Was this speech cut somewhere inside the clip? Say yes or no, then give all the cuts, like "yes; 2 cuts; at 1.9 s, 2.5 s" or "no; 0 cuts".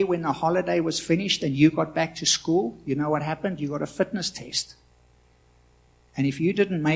no; 0 cuts